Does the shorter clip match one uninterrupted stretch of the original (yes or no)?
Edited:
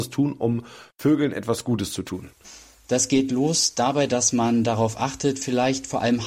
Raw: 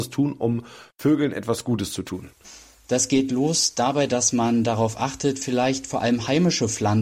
yes